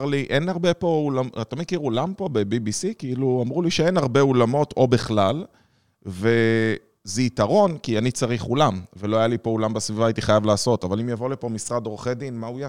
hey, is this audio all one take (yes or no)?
yes